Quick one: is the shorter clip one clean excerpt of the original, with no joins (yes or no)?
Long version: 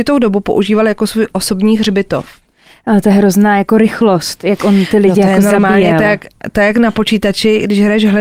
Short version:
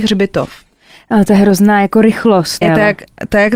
no